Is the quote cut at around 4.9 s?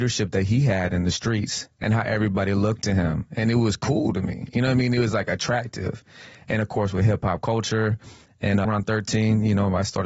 no; 1 cut; at 8.6 s

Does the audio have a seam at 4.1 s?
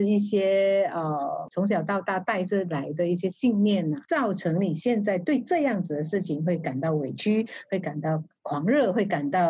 no; 0 cuts

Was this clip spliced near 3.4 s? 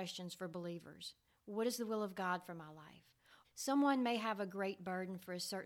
yes; 1 cut; at 3.4 s

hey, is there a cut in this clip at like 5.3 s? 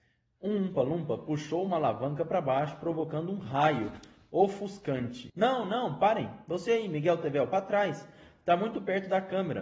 yes; 1 cut; at 5.3 s

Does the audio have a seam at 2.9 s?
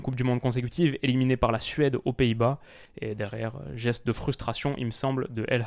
yes; 1 cut; at 2.9 s

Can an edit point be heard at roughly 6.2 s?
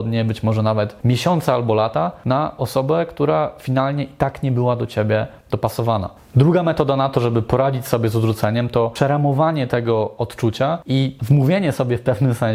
yes; 1 cut; at 6.2 s

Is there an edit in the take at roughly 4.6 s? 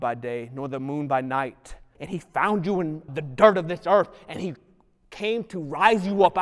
no; 2 cuts; at 2.0 s, 3.1 s

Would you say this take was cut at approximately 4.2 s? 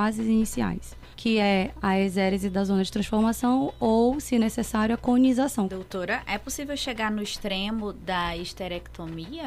no; 2 cuts; at 1.1 s, 5.7 s

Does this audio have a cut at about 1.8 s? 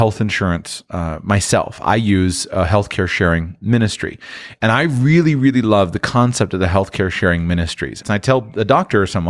no; 1 cut; at 8.0 s

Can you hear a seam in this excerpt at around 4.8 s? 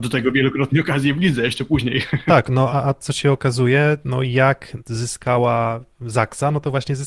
yes; 2 cuts; at 2.7 s, 4.8 s

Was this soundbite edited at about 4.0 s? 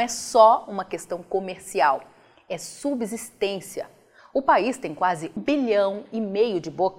no; 1 cut; at 5.4 s

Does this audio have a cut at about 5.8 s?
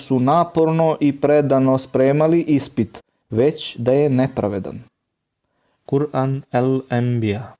yes; 2 cuts; at 3.2 s, 5.8 s

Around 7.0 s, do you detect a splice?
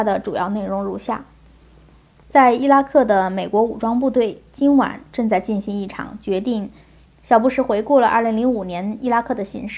yes; 1 cut; at 7.0 s

